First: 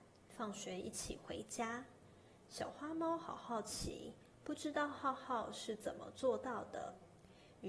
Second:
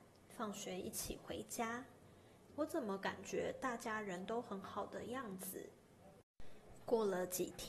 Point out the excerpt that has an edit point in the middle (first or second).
second